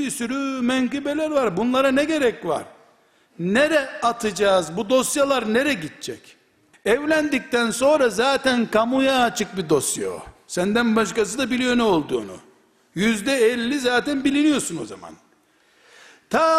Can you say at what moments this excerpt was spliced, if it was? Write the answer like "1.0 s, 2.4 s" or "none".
6.7 s